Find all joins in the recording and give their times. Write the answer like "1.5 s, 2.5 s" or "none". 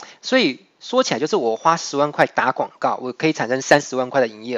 none